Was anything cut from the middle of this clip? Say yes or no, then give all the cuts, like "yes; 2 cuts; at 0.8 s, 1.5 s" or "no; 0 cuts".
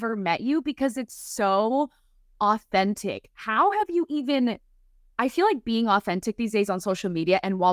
no; 0 cuts